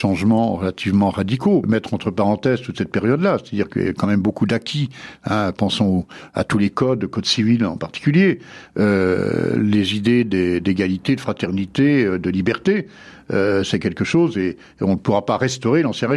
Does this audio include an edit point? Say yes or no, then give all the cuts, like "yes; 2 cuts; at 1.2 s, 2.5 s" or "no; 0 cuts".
yes; 1 cut; at 1.6 s